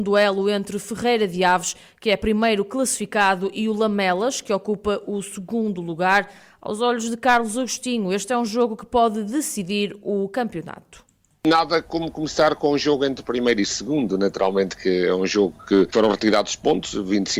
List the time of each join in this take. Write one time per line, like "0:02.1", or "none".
none